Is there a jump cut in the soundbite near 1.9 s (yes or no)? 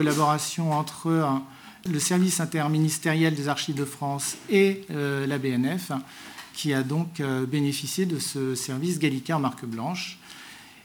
yes